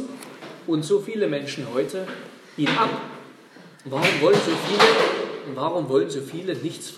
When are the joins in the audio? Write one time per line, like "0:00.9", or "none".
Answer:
0:03.7

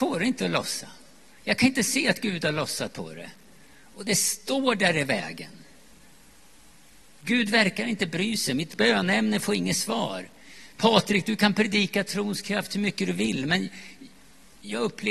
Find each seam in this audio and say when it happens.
none

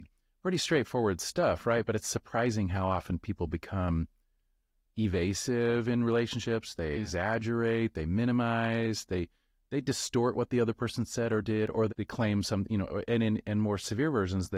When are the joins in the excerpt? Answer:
0:11.9

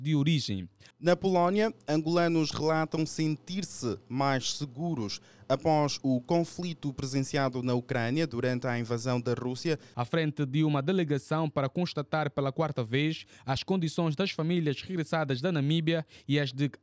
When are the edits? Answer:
0:00.9
0:09.9

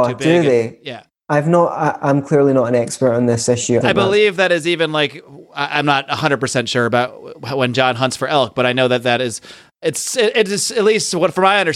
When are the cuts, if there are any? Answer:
0:03.8

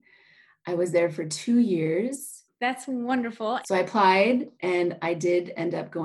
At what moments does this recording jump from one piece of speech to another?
0:02.5
0:03.6

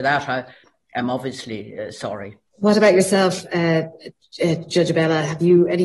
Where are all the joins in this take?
0:02.5

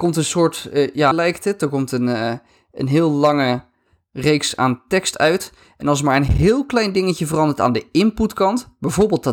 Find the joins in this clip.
0:01.1

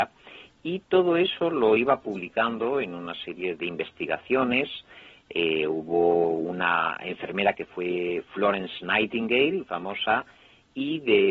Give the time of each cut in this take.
0:03.6
0:09.6

